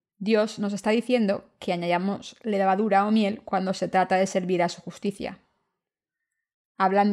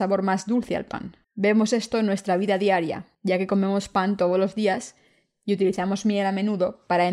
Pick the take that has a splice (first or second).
second